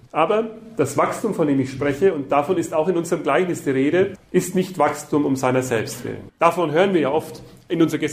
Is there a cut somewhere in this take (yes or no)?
yes